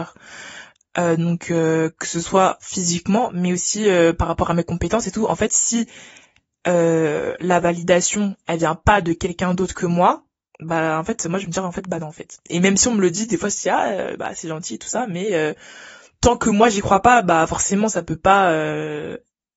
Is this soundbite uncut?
yes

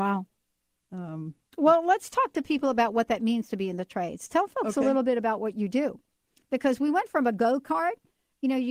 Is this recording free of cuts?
yes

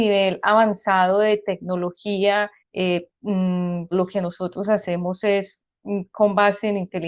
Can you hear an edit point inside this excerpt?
yes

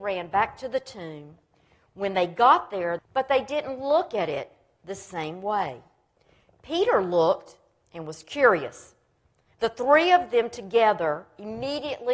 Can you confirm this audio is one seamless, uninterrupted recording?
no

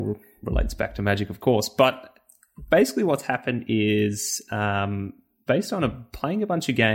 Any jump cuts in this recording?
no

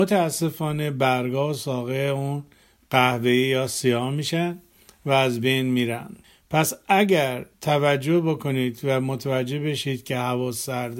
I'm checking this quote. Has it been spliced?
yes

